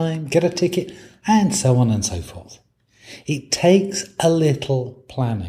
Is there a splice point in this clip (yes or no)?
no